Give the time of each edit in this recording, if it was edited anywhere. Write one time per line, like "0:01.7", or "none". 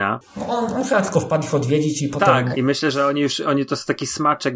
0:02.5